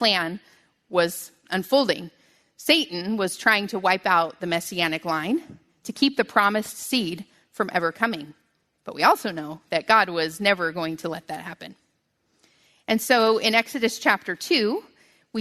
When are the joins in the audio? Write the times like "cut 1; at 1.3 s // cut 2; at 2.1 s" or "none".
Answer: none

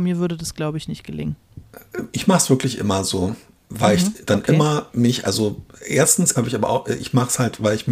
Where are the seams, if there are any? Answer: cut 1; at 6.3 s

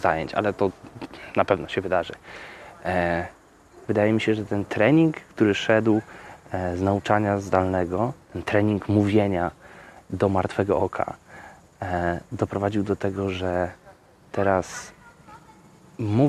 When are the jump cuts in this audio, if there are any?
cut 1; at 3.8 s

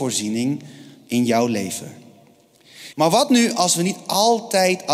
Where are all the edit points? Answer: cut 1; at 2.9 s

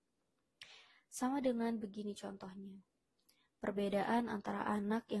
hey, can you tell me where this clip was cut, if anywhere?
none

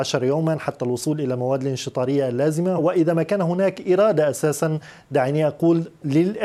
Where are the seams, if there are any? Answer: cut 1; at 2.8 s

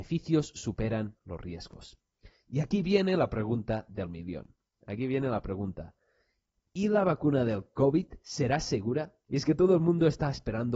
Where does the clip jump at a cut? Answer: none

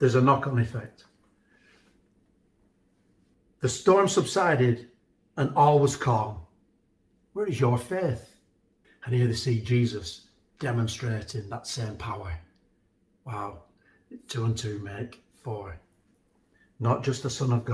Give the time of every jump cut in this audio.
cut 1; at 8.8 s

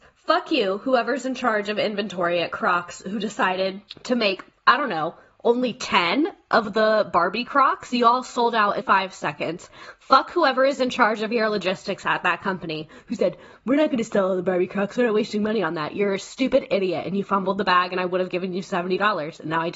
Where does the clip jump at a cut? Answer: cut 1; at 8.8 s

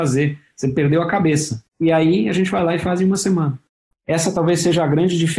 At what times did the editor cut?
cut 1; at 3.9 s

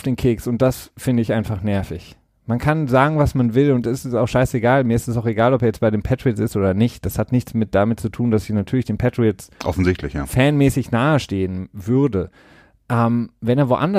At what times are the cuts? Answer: none

